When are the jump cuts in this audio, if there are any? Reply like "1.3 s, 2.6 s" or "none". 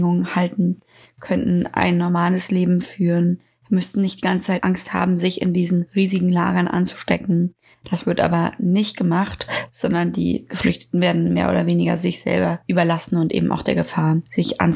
none